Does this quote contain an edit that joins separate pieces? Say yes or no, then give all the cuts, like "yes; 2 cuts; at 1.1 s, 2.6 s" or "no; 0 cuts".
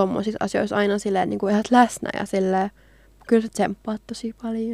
no; 0 cuts